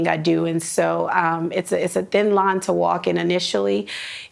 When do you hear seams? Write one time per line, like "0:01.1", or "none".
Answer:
none